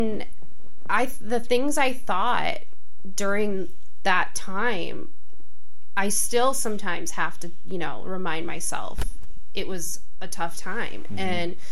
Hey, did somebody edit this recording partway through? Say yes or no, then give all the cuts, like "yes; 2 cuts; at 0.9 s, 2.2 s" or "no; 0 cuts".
no; 0 cuts